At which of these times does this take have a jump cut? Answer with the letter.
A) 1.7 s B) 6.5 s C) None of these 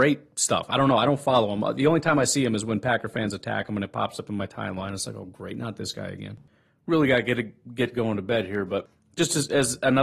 C